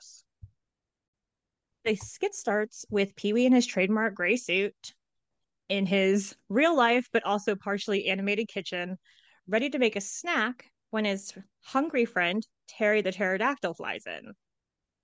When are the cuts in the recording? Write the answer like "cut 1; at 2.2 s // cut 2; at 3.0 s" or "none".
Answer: none

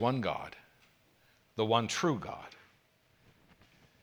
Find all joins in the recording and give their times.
none

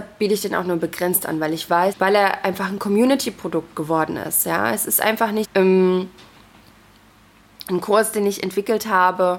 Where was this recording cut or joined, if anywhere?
cut 1; at 1.9 s // cut 2; at 5.4 s

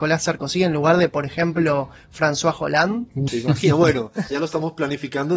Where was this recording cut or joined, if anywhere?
cut 1; at 3.3 s // cut 2; at 4.3 s

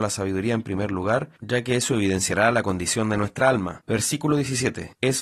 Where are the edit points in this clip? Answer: none

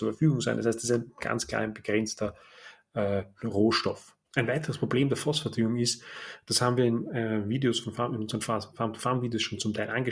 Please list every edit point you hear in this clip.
cut 1; at 4.2 s

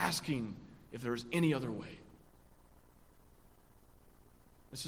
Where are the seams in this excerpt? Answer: none

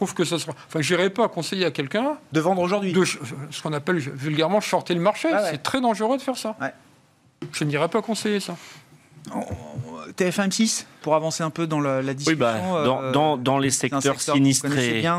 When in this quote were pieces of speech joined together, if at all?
cut 1; at 11.0 s

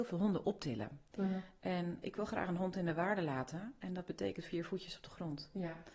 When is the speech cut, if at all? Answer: cut 1; at 2.0 s

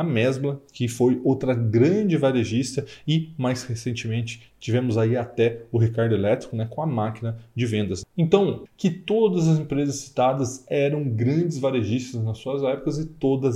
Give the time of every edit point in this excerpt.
cut 1; at 8.7 s

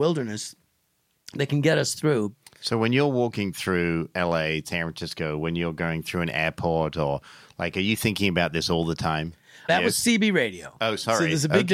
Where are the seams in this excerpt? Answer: cut 1; at 9.7 s

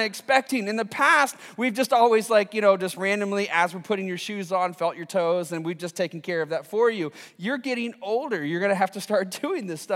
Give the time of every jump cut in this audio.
none

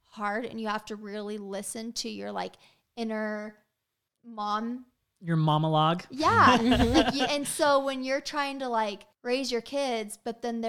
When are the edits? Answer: cut 1; at 7.3 s // cut 2; at 9.1 s

